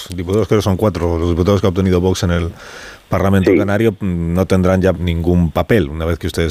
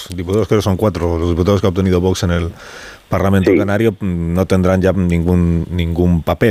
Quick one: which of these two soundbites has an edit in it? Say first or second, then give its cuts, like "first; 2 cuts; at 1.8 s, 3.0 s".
first; 1 cut; at 4.9 s